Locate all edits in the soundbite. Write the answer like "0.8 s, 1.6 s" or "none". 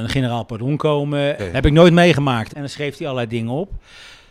1.4 s, 2.5 s